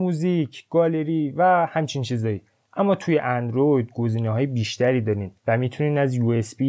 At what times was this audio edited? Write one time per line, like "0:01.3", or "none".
0:05.4

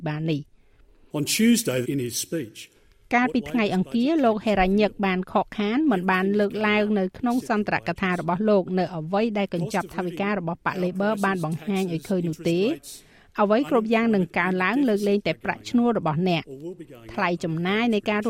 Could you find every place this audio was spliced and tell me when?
0:01.8

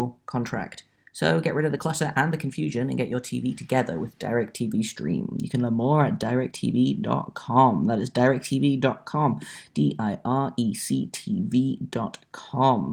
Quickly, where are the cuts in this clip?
none

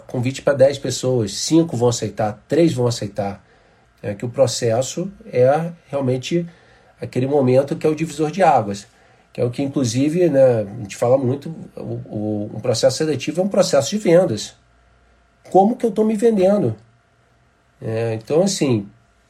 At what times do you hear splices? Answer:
0:03.8

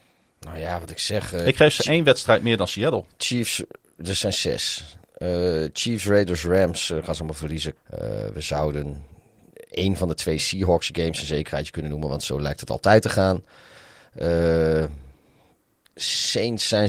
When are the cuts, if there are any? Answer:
0:07.8

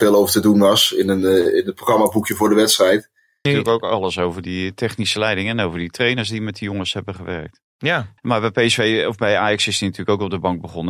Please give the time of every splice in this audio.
0:03.5
0:08.2

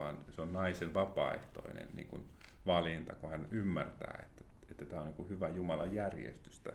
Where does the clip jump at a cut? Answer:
none

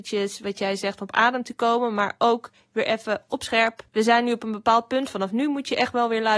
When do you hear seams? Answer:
0:03.9

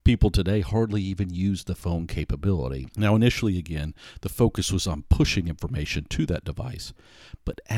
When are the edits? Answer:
0:02.9

